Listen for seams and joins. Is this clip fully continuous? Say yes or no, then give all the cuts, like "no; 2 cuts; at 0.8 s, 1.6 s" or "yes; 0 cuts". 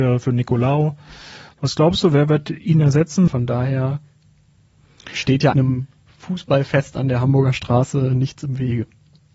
no; 2 cuts; at 3.3 s, 5.5 s